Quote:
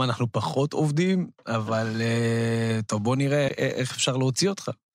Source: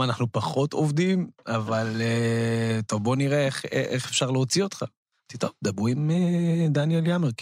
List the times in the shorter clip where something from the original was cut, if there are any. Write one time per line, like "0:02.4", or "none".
0:03.5